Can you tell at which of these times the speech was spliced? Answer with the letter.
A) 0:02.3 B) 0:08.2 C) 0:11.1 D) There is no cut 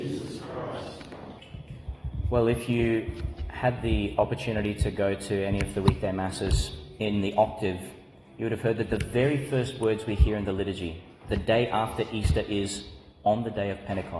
D